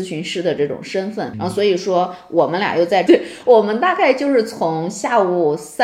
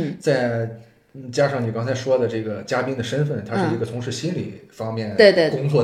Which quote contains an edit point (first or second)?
first